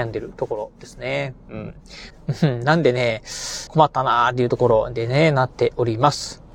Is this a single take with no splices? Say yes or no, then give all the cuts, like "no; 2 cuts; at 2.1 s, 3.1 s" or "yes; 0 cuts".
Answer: no; 2 cuts; at 2.1 s, 3.7 s